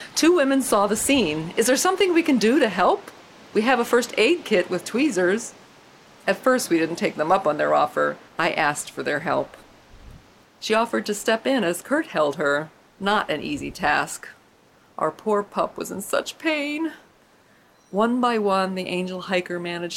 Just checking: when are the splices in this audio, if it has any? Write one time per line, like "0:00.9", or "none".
0:08.3
0:10.4